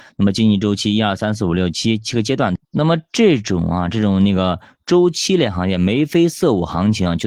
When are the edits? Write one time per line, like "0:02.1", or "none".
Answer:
0:02.6